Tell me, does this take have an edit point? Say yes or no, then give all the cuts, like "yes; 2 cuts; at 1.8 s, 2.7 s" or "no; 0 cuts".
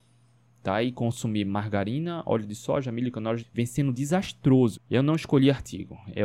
yes; 2 cuts; at 3.4 s, 4.7 s